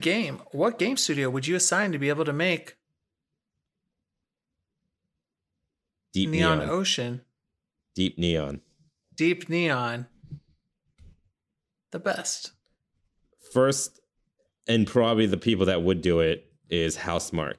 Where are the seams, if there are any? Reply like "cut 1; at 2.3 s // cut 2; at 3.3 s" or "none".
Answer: none